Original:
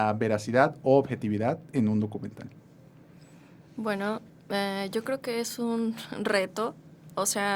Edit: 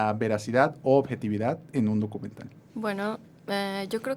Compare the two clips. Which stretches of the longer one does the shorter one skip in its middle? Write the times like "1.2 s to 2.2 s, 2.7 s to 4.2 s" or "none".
2.7 s to 3.7 s